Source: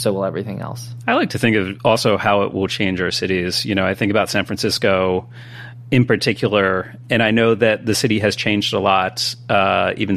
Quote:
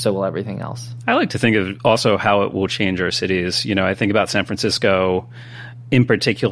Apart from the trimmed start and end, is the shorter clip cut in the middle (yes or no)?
no